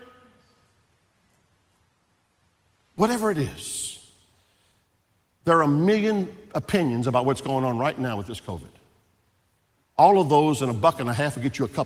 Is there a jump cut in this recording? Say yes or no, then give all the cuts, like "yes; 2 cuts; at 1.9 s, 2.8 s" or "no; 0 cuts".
no; 0 cuts